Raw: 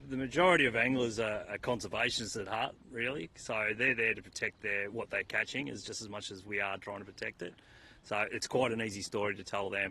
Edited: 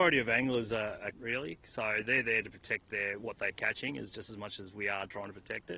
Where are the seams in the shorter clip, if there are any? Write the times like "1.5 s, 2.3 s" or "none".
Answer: 1.1 s